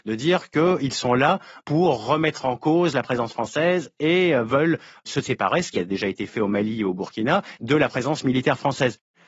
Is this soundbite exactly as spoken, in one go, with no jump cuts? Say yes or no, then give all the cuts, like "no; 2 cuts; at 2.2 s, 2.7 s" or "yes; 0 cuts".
no; 1 cut; at 7.6 s